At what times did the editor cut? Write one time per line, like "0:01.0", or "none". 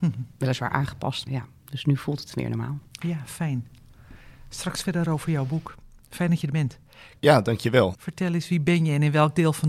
0:01.3
0:07.1